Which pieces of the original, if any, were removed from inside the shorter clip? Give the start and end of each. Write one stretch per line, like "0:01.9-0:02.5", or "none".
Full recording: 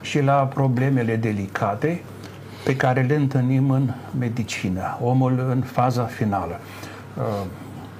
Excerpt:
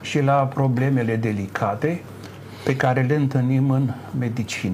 none